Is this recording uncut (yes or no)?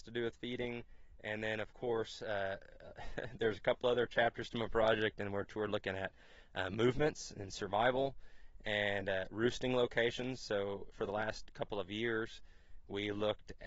yes